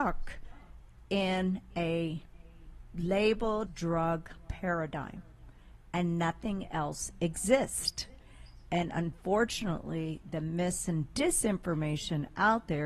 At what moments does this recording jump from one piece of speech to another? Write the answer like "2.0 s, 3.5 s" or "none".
3.7 s